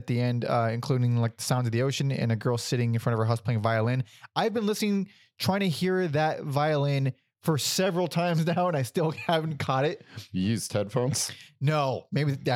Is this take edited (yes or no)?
no